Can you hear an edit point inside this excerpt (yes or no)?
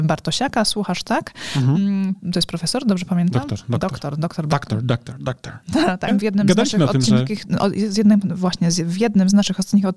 yes